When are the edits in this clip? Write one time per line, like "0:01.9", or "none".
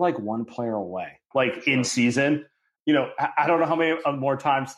0:01.3
0:02.7